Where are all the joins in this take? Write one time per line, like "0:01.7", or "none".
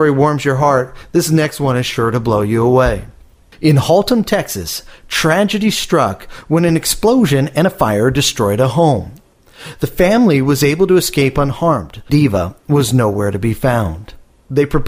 0:12.1